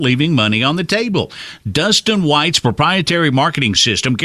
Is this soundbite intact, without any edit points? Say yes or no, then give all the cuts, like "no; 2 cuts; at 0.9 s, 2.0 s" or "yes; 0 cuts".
yes; 0 cuts